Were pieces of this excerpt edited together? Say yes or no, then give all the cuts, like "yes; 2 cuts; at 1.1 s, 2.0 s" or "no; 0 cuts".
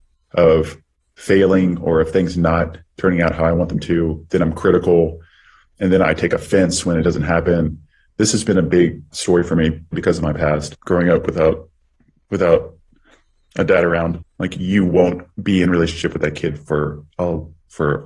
yes; 3 cuts; at 9.9 s, 14.2 s, 15.3 s